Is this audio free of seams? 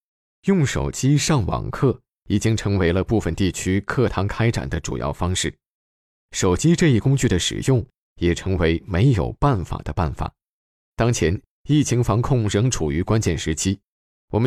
yes; 0 cuts

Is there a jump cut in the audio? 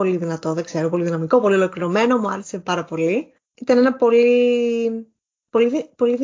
yes; 1 cut; at 3.4 s

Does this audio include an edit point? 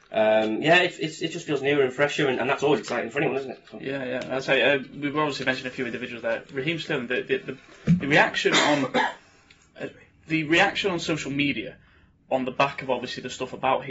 no; 0 cuts

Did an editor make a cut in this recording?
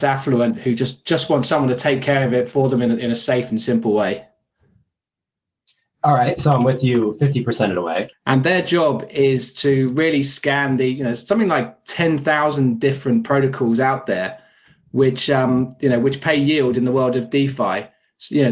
yes; 1 cut; at 8.1 s

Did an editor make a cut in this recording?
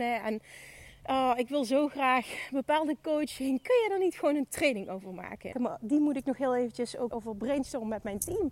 yes; 2 cuts; at 5.5 s, 7.1 s

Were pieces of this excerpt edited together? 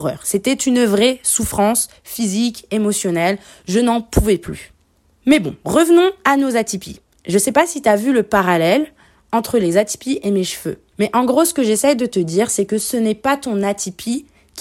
no; 0 cuts

